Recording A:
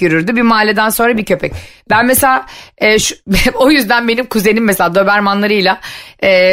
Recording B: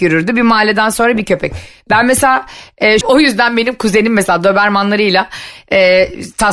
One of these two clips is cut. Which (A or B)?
B